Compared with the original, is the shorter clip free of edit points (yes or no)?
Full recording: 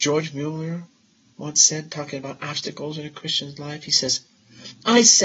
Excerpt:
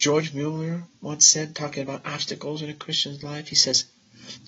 no